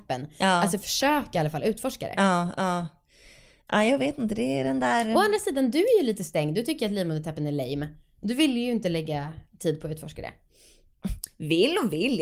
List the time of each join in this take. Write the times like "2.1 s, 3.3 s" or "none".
none